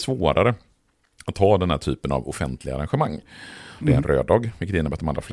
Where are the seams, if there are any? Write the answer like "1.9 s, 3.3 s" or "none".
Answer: 3.8 s